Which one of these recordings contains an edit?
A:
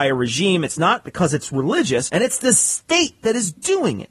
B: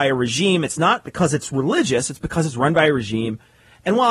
A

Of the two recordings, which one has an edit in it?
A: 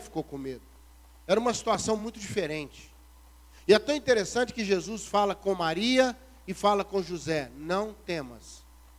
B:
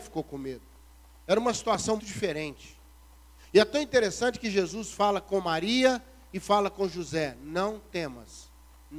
B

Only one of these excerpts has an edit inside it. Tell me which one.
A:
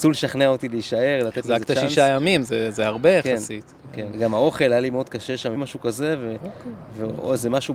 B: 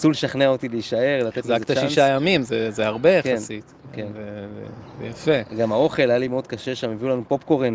A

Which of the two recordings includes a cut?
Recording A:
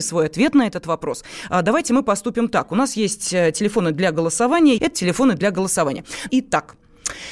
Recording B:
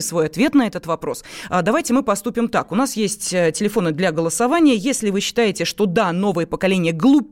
A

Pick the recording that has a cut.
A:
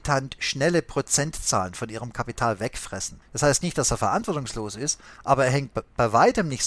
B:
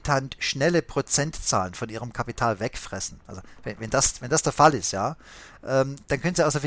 A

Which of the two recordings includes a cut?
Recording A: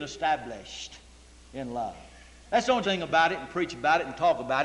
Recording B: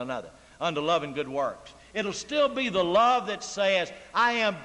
A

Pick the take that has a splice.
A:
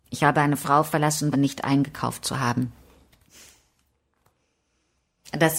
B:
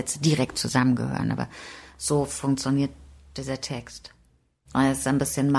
A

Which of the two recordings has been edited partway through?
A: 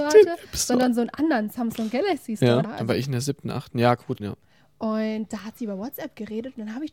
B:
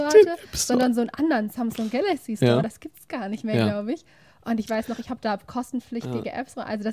A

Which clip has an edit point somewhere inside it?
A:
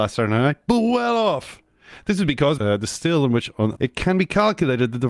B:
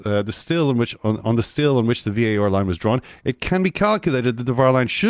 A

